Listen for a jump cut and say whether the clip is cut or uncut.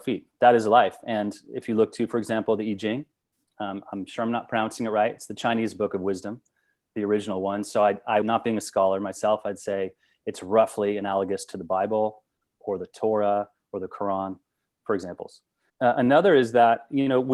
cut